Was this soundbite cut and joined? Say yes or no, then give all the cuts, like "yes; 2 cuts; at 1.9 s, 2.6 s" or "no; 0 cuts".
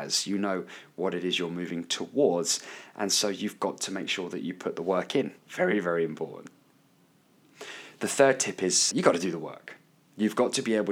yes; 2 cuts; at 5.4 s, 8.9 s